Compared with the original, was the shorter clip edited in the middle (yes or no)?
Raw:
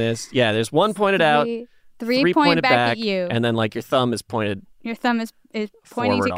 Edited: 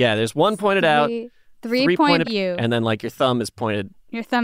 yes